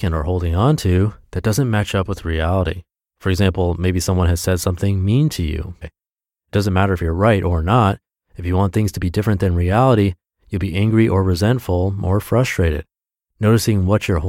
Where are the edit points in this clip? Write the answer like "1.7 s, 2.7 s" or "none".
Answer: 5.8 s